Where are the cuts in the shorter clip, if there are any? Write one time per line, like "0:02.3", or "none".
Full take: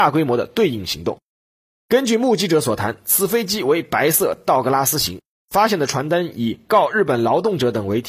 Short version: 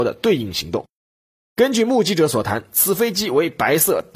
none